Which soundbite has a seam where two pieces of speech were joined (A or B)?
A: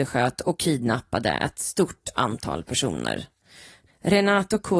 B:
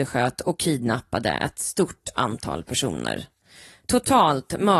A